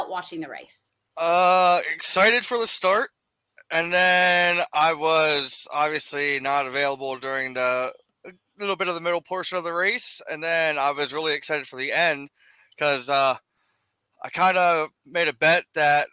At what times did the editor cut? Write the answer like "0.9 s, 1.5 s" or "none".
none